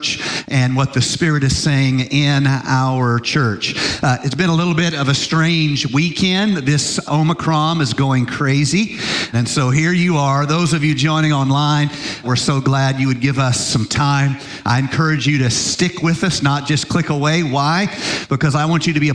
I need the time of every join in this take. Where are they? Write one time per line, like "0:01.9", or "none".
0:07.1
0:09.3
0:12.2